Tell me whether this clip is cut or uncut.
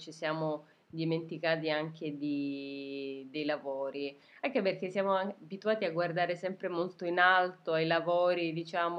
uncut